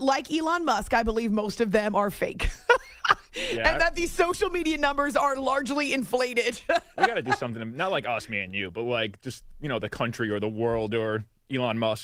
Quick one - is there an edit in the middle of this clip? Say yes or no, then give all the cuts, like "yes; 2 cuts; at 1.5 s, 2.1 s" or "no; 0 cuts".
no; 0 cuts